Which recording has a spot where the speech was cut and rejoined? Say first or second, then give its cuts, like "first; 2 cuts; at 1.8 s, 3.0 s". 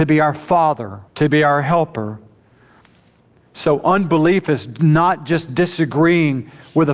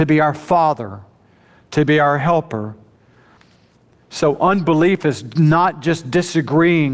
first; 1 cut; at 1.1 s